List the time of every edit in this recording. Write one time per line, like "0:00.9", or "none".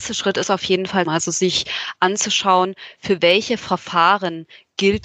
0:01.1